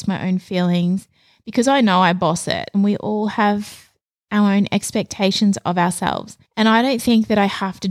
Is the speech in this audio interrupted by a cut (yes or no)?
yes